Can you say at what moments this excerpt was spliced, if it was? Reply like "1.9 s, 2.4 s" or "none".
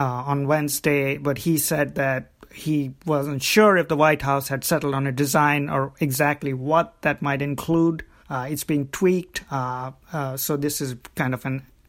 8.2 s